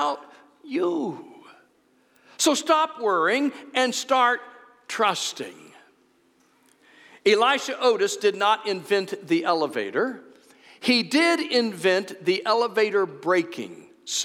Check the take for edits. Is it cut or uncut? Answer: uncut